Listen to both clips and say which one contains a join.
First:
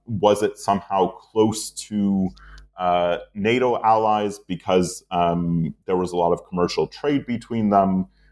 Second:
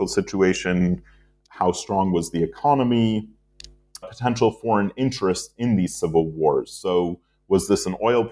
second; 1 cut; at 4.0 s

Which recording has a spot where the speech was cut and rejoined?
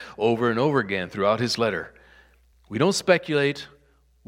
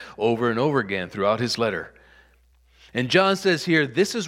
first; 1 cut; at 2.5 s

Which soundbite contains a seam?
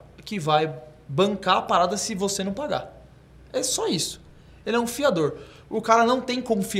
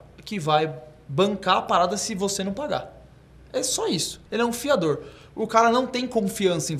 second; 1 cut; at 4.3 s

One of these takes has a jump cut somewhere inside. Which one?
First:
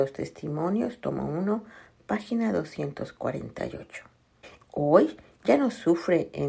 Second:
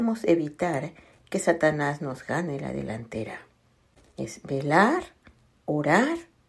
first; 1 cut; at 4.6 s

